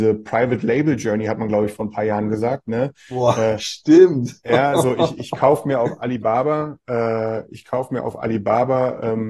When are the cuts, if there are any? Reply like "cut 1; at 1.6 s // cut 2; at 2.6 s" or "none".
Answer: none